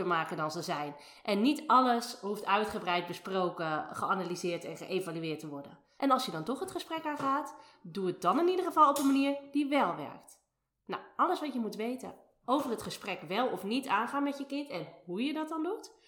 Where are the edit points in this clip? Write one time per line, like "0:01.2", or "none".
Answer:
0:06.0